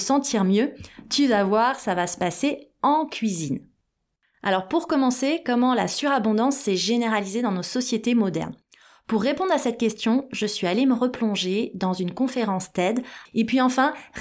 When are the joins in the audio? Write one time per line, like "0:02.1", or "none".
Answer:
0:13.3

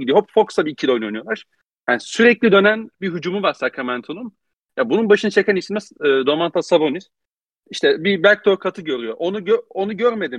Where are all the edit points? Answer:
0:07.5

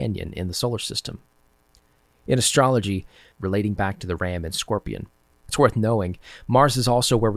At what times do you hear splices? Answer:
0:03.3
0:05.4

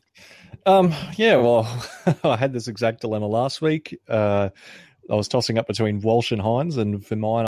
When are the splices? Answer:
none

